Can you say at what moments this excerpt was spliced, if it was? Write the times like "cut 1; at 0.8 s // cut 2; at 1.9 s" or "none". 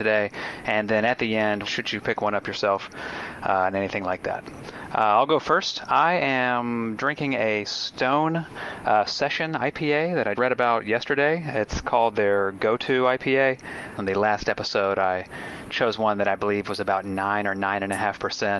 cut 1; at 1.6 s // cut 2; at 10.4 s // cut 3; at 14.0 s